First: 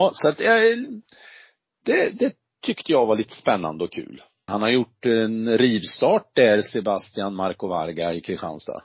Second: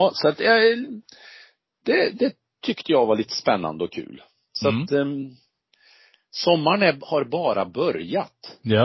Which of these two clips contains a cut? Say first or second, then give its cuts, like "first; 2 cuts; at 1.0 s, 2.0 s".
first; 1 cut; at 4.5 s